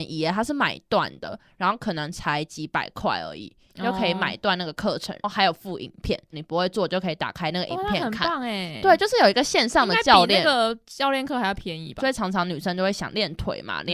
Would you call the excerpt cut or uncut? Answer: cut